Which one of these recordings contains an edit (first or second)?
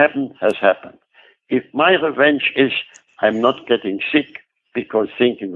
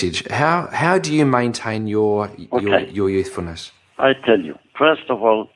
first